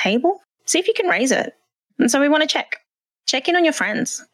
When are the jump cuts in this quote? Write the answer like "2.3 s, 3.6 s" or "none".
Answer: 1.9 s